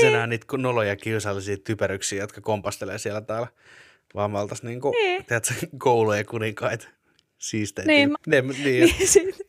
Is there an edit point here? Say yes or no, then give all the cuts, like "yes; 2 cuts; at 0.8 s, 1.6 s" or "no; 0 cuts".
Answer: yes; 1 cut; at 8.1 s